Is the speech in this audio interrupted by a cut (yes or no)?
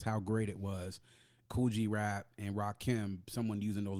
yes